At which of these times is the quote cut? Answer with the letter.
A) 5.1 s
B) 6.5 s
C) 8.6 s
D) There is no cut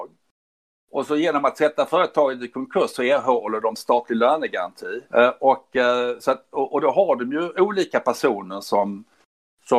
A